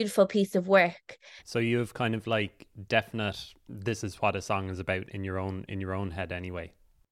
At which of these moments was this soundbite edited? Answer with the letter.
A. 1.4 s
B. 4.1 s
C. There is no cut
A